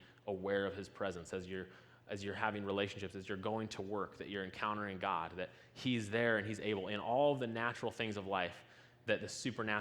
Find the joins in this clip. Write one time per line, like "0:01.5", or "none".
none